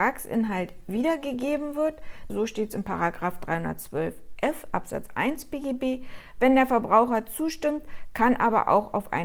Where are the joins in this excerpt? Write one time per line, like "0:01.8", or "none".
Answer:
0:02.3